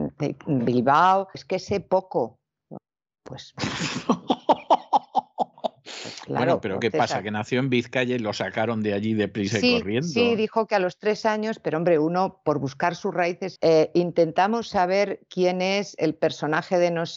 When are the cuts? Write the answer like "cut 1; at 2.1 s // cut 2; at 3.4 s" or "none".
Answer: cut 1; at 1.3 s // cut 2; at 13.6 s